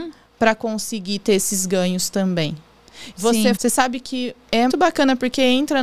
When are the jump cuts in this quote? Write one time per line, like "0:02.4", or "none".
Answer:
0:03.6
0:04.7